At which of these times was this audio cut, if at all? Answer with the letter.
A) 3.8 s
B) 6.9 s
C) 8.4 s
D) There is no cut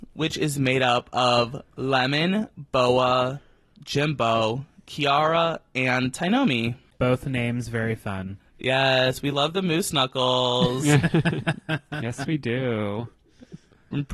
B